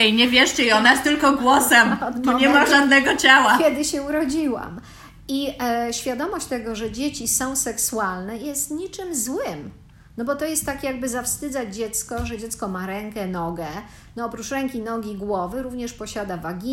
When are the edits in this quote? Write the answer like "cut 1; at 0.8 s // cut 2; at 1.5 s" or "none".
none